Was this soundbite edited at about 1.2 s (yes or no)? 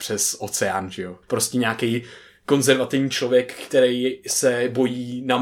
yes